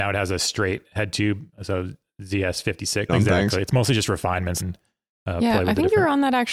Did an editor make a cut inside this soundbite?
yes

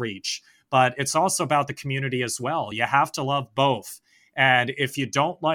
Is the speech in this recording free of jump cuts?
yes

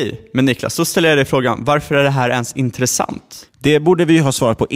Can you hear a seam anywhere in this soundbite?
no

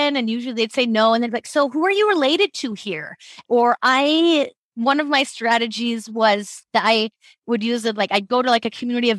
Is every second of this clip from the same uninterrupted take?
no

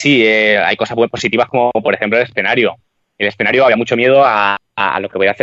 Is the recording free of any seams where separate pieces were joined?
yes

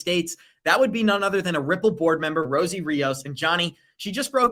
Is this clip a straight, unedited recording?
yes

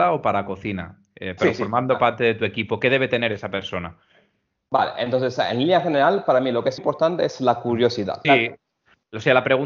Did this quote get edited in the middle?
yes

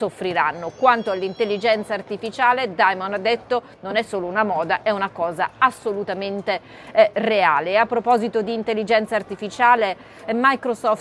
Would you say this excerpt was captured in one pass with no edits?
yes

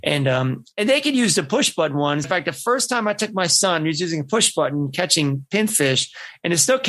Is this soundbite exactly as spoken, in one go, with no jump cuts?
no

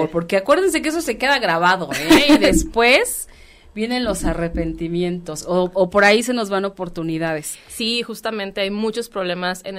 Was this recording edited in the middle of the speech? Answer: no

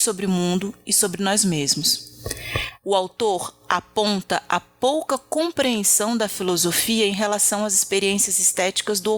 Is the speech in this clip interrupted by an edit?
yes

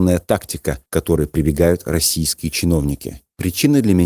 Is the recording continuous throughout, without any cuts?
yes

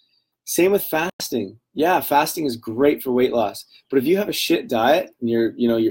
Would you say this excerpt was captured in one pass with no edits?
yes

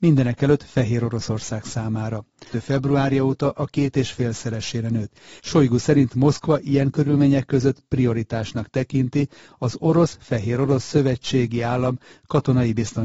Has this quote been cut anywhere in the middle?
yes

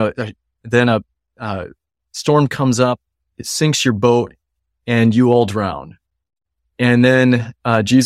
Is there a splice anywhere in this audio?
no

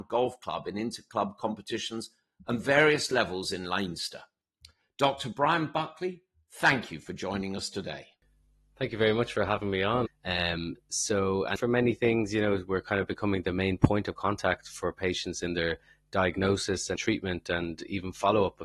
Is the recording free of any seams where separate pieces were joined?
no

